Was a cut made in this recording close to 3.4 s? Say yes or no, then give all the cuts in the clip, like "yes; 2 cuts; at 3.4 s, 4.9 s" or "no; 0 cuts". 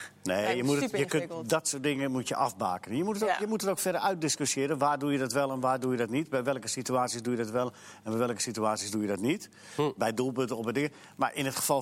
no; 0 cuts